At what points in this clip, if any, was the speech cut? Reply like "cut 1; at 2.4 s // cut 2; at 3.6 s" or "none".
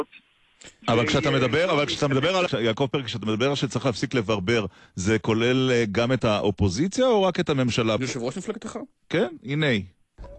cut 1; at 2.5 s // cut 2; at 8.0 s